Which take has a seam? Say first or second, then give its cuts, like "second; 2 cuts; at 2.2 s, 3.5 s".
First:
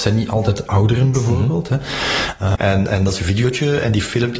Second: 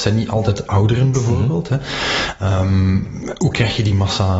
first; 1 cut; at 2.6 s